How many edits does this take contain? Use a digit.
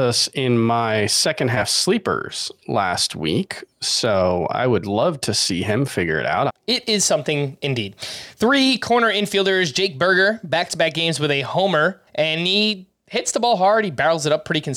2